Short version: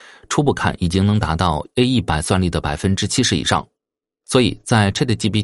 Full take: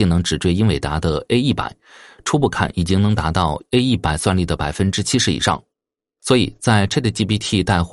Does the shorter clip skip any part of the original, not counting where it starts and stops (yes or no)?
no